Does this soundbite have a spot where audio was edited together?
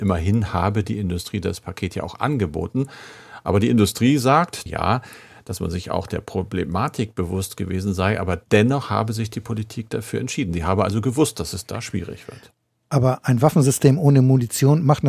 yes; 1 cut; at 4.7 s

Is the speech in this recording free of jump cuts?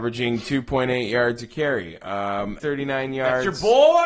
no; 1 cut; at 2.6 s

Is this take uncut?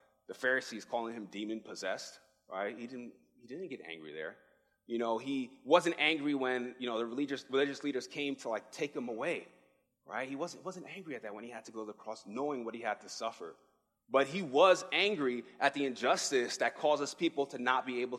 yes; 0 cuts

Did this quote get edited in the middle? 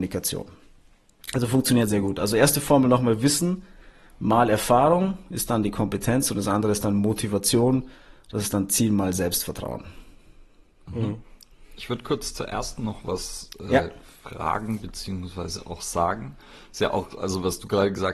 no; 0 cuts

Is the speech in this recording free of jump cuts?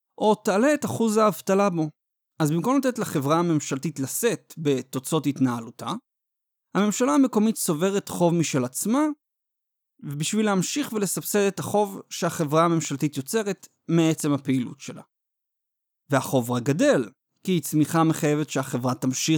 yes; 0 cuts

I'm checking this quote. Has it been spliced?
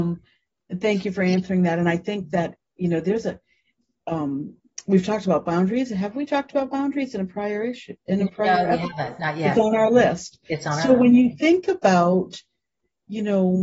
no; 0 cuts

